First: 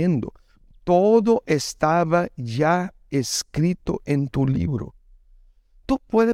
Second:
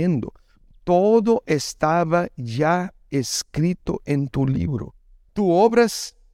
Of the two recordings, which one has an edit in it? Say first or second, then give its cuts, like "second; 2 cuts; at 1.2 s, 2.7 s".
second; 1 cut; at 5.3 s